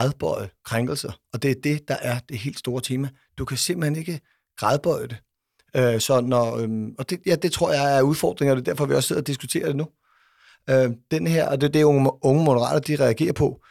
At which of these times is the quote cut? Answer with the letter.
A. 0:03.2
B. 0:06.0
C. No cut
C